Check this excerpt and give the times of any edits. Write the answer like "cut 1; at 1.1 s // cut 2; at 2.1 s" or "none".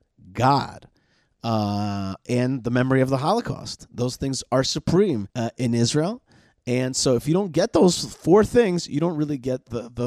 cut 1; at 5.3 s